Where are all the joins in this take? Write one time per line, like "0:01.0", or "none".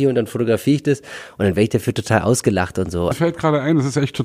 0:03.1